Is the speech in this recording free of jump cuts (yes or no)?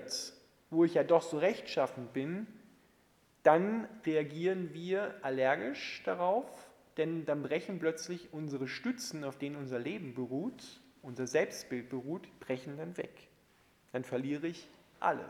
yes